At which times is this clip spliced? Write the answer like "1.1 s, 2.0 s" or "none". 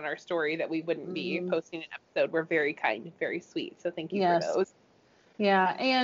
none